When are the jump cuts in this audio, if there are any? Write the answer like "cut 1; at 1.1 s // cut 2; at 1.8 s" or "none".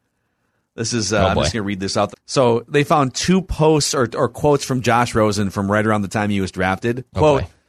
cut 1; at 2.1 s